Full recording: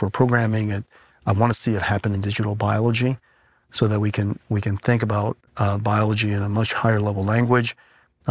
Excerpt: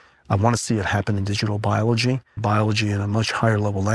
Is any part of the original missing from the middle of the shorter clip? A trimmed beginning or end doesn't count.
yes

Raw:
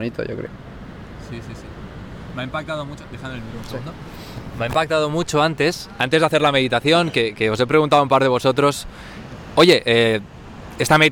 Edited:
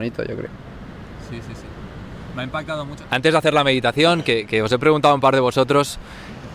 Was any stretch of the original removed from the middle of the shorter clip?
yes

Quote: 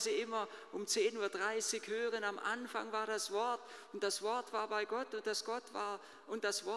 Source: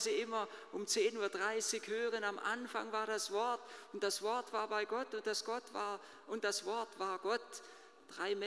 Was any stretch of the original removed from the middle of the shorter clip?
no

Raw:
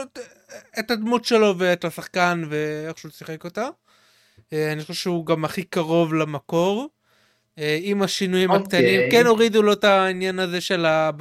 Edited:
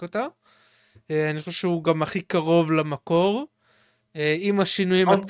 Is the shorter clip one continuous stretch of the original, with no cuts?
yes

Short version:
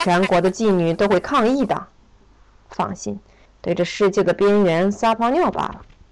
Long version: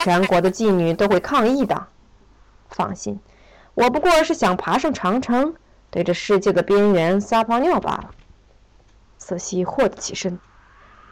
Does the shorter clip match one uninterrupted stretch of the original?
no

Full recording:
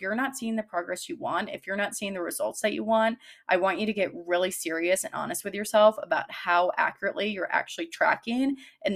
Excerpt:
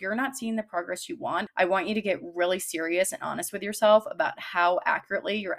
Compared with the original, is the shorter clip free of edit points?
no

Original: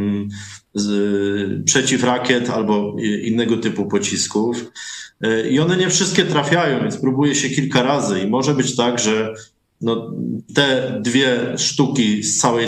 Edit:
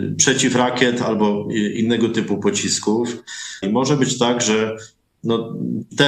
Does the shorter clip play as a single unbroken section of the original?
no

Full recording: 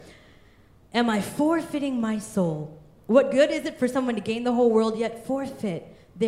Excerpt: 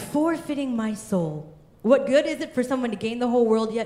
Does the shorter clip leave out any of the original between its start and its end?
no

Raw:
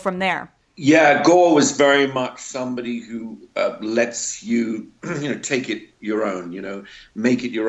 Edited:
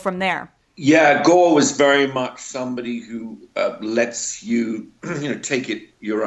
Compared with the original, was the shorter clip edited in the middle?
no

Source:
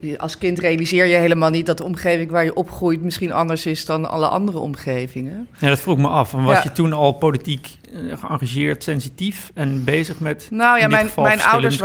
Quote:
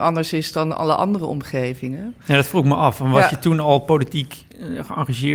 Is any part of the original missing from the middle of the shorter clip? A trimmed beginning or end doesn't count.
no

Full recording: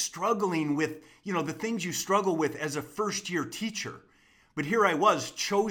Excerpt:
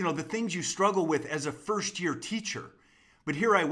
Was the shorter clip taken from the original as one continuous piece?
yes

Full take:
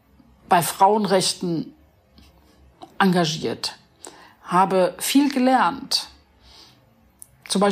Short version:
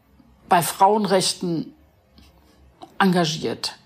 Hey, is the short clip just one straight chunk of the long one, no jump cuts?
yes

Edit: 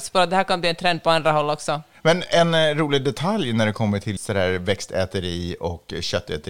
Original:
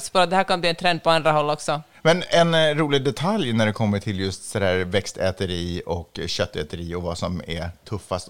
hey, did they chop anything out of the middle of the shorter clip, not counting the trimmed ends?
yes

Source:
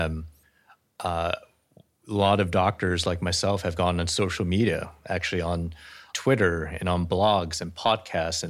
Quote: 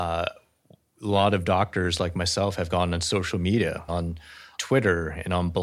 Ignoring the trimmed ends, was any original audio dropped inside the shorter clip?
yes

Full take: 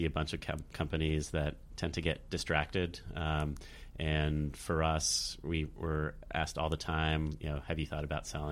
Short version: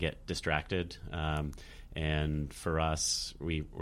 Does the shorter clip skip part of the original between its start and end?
no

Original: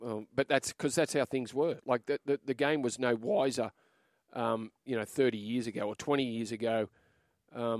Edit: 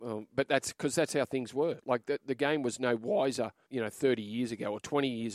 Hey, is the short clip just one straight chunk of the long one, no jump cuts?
no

